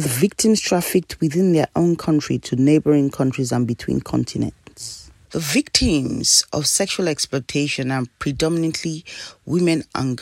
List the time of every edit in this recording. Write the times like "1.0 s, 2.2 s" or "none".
5.3 s